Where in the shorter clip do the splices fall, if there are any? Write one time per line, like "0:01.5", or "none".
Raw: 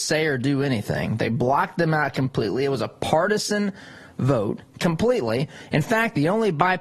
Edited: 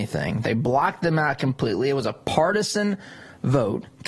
none